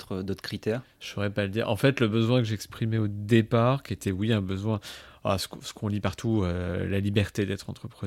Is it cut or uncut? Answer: uncut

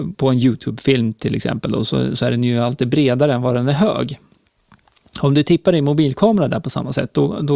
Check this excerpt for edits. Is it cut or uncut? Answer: uncut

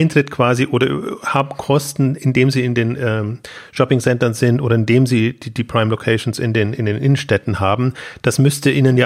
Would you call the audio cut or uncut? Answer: uncut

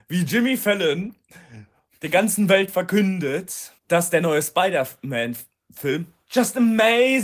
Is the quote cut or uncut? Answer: cut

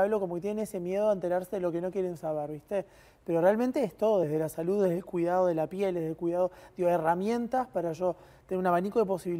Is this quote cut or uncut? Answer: uncut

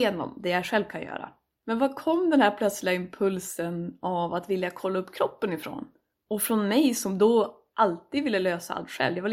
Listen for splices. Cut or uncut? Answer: cut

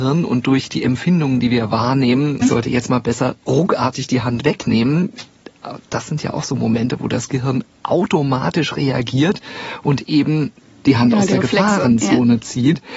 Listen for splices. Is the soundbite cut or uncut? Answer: cut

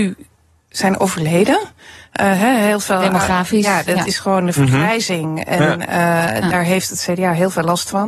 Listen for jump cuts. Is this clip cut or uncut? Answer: uncut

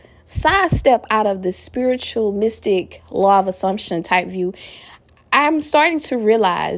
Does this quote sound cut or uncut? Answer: uncut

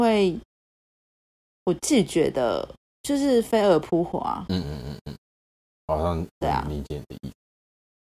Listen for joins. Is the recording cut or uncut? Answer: cut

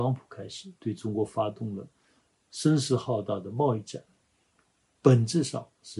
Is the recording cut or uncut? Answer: uncut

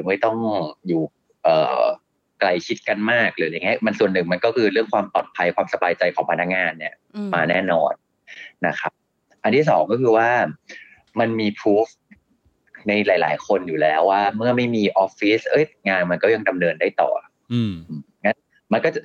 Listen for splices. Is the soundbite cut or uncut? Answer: uncut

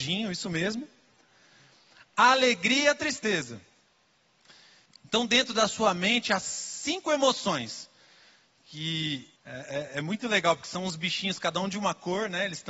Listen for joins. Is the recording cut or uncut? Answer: cut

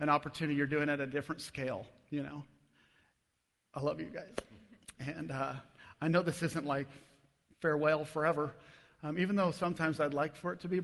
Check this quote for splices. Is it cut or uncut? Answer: uncut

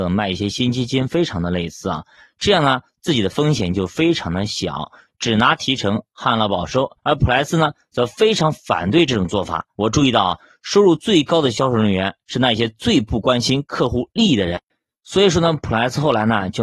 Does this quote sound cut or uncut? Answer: cut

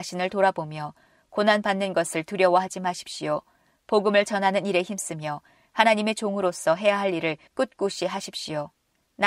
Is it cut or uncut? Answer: uncut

